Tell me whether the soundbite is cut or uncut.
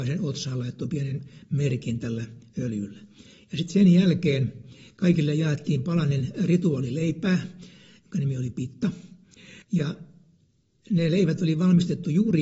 cut